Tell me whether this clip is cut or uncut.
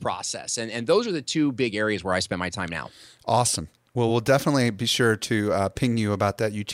uncut